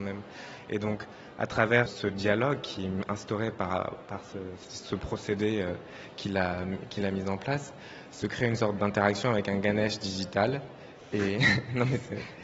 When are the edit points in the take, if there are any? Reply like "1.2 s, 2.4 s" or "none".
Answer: 1.9 s